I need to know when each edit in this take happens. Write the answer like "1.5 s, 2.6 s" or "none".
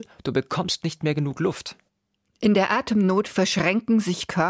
none